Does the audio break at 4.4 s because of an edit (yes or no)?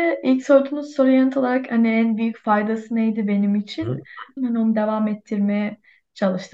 yes